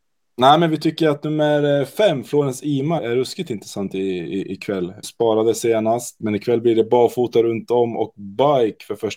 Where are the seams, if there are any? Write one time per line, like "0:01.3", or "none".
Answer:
0:03.0
0:05.0
0:06.2